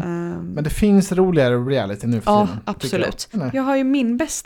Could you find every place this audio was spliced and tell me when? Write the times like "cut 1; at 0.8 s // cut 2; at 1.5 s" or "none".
cut 1; at 3.3 s

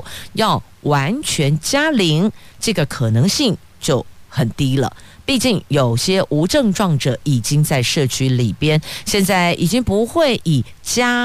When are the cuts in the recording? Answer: none

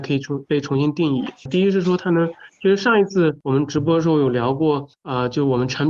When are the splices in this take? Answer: cut 1; at 1.5 s

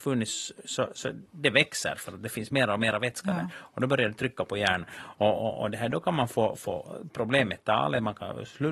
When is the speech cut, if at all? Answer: none

